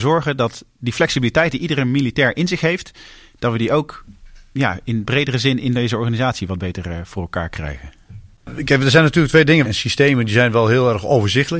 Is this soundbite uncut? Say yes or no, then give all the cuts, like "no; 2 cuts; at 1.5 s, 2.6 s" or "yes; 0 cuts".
no; 1 cut; at 9.6 s